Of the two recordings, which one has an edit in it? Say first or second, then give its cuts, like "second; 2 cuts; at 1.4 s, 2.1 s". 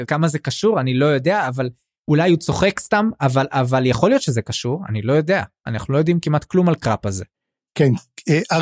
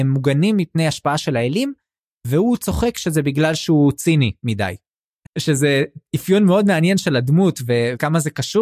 second; 1 cut; at 5.2 s